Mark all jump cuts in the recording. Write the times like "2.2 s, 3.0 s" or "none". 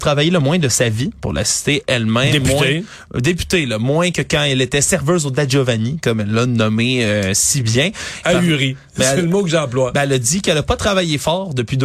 8.2 s